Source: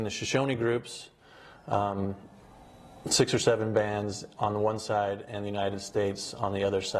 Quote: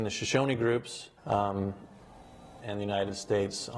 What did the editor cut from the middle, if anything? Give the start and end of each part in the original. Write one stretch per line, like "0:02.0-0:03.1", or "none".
0:01.2-0:01.6
0:03.0-0:05.3